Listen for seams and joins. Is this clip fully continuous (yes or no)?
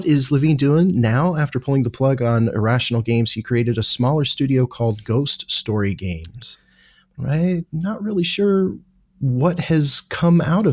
yes